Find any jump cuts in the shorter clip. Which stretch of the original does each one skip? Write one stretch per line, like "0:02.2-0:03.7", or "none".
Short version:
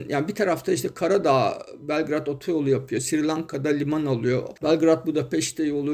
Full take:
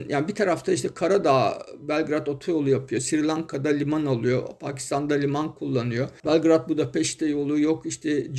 0:04.6-0:06.2